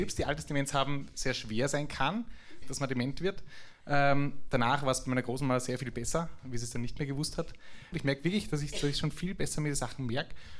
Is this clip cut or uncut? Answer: cut